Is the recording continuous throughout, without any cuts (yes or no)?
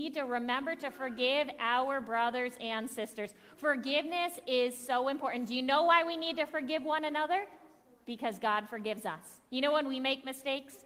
yes